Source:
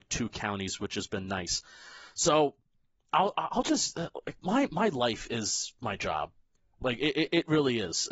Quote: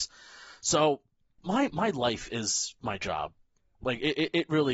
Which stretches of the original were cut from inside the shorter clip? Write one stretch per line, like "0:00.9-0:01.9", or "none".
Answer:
0:02.9-0:04.4